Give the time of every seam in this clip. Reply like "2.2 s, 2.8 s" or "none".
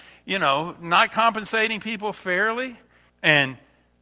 3.1 s